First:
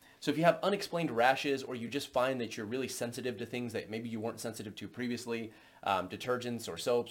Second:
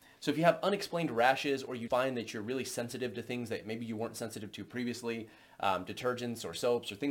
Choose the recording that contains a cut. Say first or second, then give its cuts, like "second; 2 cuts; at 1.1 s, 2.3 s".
second; 1 cut; at 1.9 s